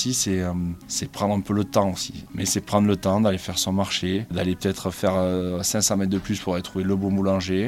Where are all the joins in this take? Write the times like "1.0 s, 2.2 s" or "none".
2.3 s, 4.3 s